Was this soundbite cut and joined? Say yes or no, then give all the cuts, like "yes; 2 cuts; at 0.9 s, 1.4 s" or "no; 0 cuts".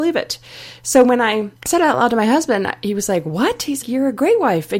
yes; 2 cuts; at 1.6 s, 3.8 s